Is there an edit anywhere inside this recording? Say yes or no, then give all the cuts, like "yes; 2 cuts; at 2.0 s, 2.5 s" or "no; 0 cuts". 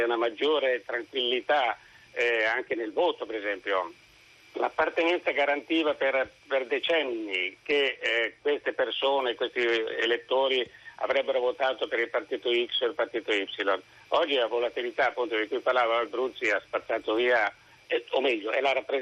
no; 0 cuts